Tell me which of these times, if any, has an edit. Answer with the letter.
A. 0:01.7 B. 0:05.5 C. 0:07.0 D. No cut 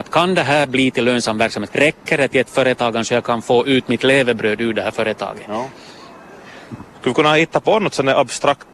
A